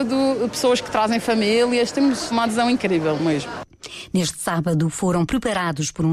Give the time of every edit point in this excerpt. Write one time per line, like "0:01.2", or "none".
0:02.3